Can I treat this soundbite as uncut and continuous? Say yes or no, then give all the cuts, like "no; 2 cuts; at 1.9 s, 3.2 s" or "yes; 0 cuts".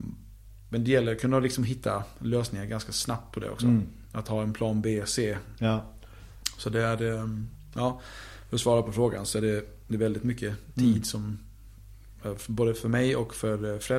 yes; 0 cuts